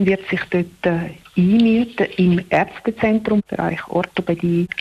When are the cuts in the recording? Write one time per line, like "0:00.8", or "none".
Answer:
0:03.4